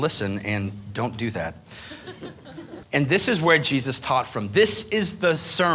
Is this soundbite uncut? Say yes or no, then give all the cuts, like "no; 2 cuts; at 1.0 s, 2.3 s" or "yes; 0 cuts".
no; 1 cut; at 2.8 s